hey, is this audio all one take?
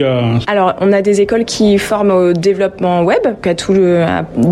no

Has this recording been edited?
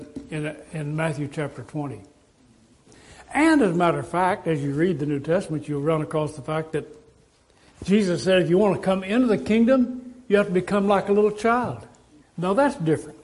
yes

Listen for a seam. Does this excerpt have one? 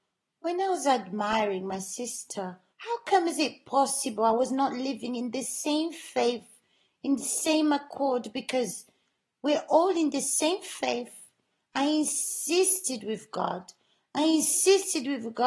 yes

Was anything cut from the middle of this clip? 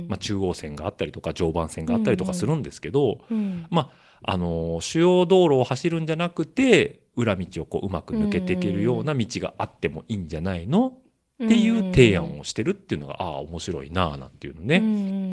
no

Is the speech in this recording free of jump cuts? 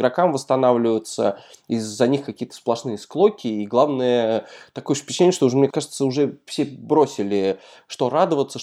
no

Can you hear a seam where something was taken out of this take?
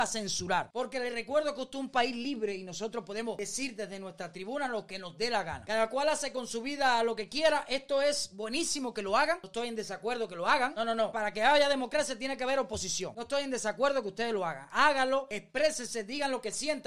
yes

